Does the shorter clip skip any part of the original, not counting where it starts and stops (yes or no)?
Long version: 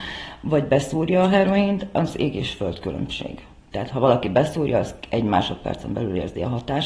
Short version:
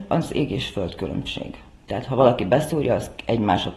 no